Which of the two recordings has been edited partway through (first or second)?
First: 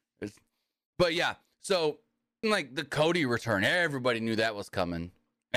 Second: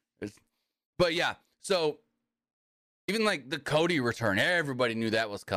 first